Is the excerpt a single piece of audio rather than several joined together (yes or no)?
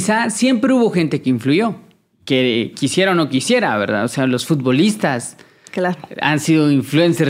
yes